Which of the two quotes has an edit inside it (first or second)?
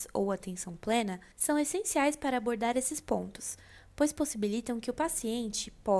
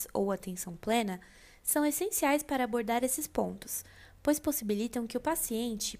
first